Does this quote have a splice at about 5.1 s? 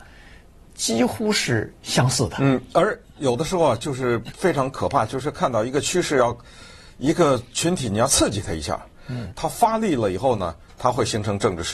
no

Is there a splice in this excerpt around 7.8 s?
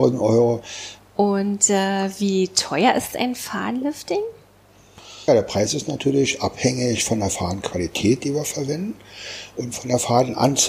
no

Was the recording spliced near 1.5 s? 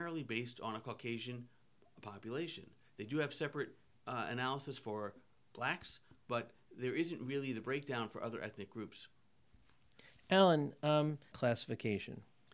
no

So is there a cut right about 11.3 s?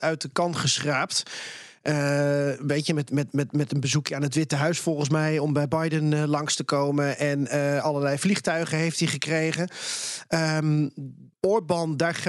yes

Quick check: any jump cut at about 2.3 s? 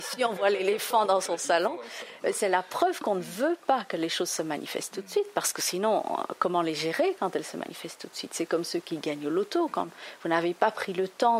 no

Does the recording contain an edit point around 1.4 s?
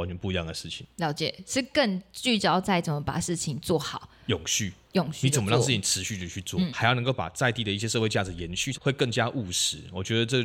no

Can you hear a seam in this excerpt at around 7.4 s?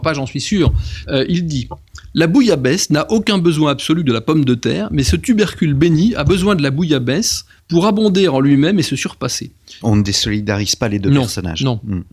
no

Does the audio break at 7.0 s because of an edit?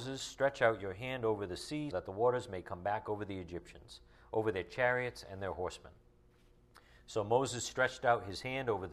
no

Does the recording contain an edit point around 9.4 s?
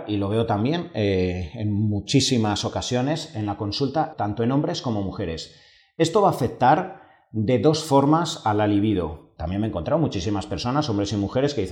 yes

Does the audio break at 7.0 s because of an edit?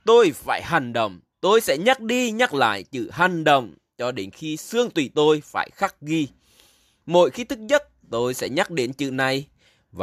no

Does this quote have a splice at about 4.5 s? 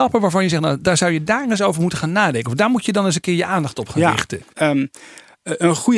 yes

